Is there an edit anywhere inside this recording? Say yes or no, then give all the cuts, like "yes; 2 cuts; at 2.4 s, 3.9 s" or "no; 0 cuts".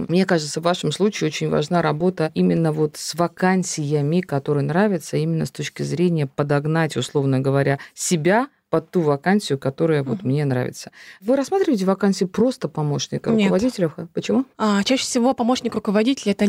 no; 0 cuts